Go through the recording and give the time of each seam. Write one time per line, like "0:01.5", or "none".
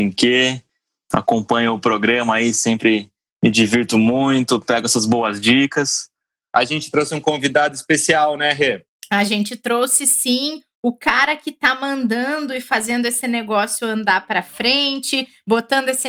0:06.4